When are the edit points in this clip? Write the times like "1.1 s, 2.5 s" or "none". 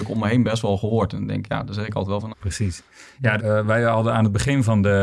2.3 s, 3.4 s

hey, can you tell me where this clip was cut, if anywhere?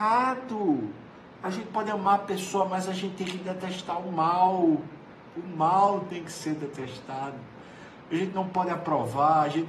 none

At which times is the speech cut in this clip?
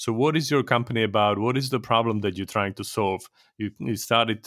none

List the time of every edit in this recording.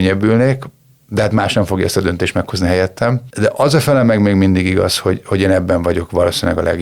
none

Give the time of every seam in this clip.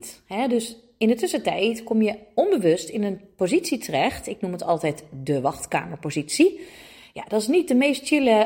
none

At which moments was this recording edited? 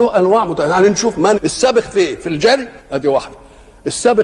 1.3 s, 2.8 s

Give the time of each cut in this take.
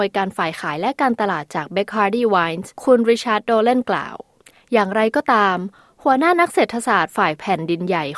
none

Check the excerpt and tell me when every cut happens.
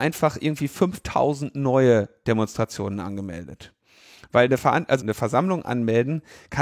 5.0 s

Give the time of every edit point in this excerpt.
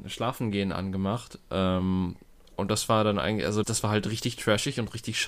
3.6 s

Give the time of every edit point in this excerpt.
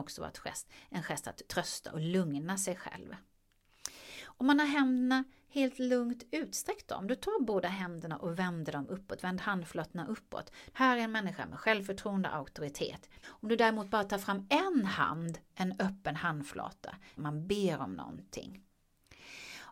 10.7 s, 13.2 s, 17.2 s

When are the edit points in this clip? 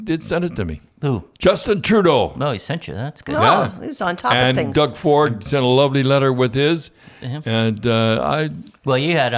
1.3 s

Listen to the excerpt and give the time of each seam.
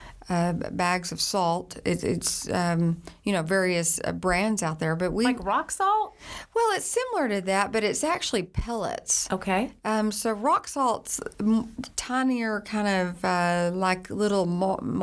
none

